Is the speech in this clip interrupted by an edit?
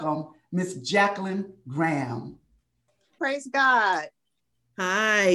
yes; 1 cut; at 3.2 s

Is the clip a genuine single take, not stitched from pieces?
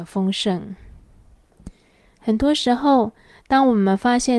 yes; 0 cuts

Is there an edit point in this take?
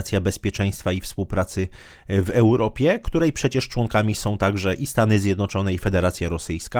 no; 0 cuts

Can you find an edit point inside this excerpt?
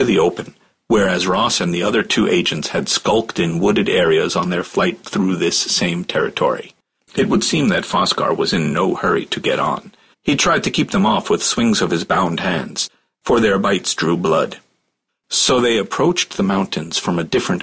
yes; 3 cuts; at 7.0 s, 10.1 s, 15.1 s

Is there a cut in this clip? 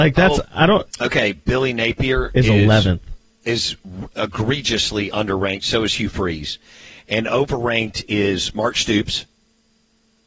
yes; 1 cut; at 0.9 s

